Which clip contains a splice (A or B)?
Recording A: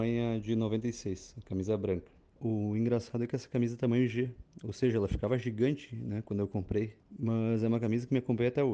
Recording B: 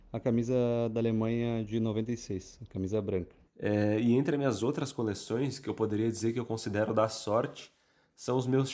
B